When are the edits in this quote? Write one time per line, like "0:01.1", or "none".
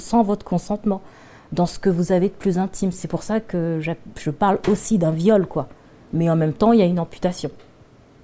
none